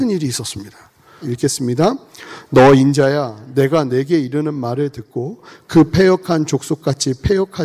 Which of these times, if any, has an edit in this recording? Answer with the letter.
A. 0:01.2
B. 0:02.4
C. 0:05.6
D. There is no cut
A